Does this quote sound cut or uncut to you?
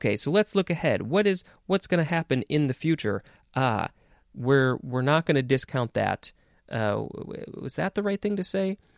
uncut